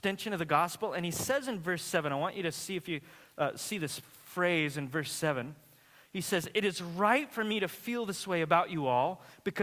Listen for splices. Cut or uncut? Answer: uncut